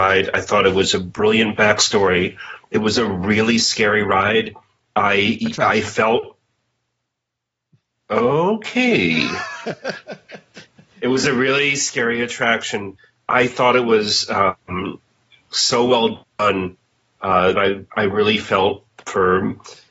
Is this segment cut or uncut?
cut